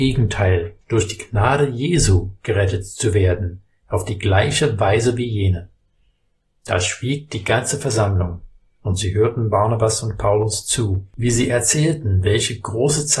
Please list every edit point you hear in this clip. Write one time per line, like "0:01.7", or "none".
0:02.4